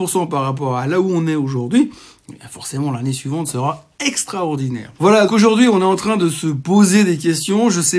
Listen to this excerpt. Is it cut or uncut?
cut